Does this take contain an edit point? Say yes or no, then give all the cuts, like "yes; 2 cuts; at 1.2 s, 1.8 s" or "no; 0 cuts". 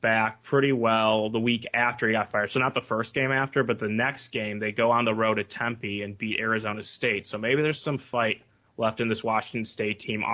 no; 0 cuts